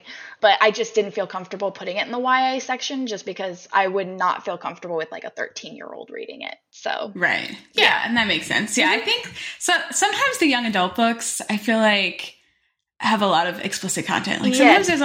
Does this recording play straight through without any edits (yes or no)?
yes